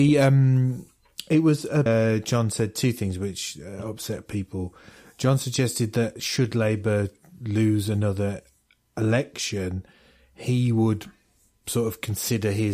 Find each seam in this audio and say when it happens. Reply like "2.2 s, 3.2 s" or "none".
1.9 s